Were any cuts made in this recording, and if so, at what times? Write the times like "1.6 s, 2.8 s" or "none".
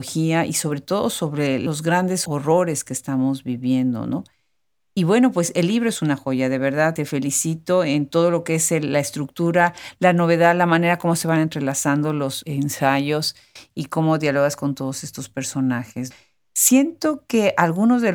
none